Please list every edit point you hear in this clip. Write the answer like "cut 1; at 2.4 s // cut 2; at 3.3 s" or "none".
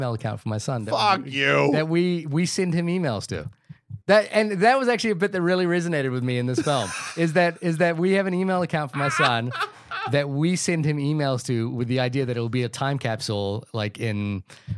cut 1; at 4.0 s